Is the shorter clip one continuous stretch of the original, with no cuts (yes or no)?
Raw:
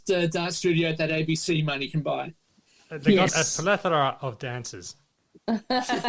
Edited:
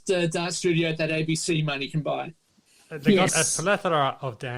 yes